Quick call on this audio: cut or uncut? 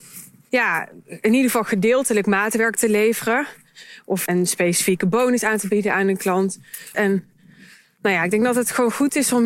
cut